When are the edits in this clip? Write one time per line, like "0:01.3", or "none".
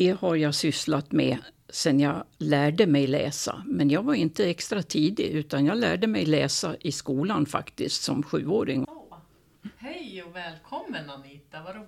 0:08.8